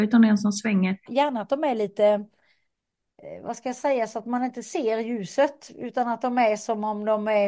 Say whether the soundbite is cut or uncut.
cut